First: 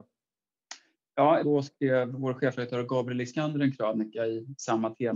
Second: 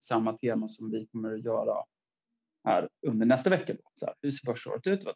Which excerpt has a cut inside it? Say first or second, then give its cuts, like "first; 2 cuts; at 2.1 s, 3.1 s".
first; 1 cut; at 1.4 s